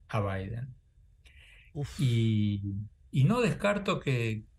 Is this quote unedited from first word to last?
yes; 0 cuts

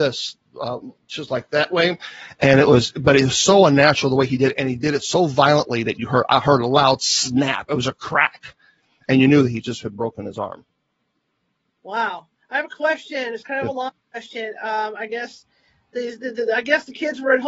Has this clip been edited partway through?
no; 0 cuts

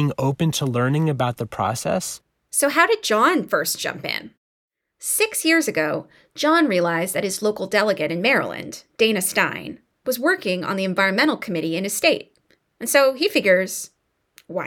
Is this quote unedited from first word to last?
yes; 0 cuts

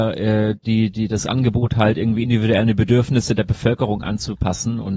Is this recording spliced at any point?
no; 0 cuts

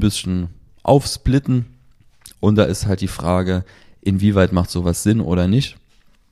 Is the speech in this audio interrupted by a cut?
no; 0 cuts

